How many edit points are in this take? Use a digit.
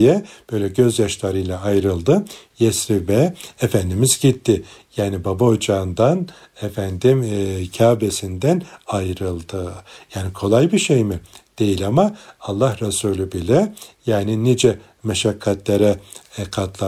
1